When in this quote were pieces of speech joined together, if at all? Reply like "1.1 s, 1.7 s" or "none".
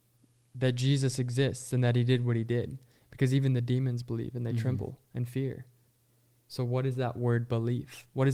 none

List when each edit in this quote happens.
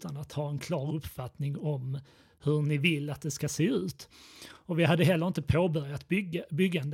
none

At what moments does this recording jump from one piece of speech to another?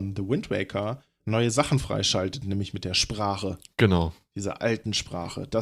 none

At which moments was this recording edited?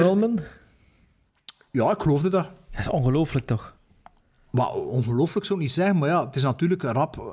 none

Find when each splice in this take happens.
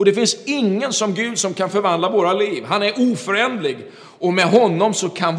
none

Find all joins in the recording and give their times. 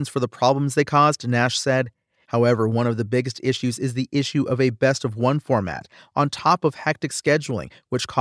2.2 s

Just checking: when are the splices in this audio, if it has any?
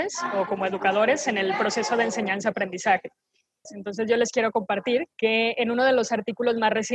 3.6 s, 5.1 s

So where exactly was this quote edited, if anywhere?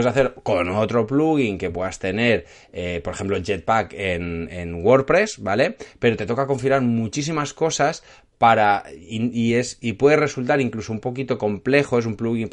none

